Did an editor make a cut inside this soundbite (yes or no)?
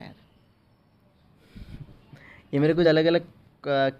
no